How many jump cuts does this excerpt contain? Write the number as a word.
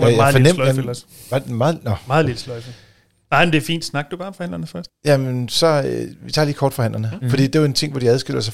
zero